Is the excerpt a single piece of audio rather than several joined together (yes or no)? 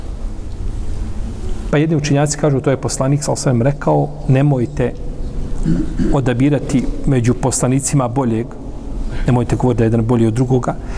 yes